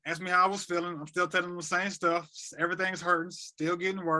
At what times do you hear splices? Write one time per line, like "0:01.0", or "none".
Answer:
none